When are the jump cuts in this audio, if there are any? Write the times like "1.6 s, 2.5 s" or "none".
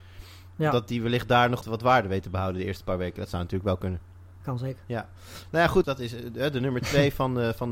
1.6 s, 4.4 s, 5.8 s